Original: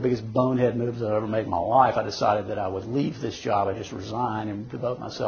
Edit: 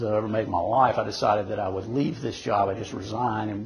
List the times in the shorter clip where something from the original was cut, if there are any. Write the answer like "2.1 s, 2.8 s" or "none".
none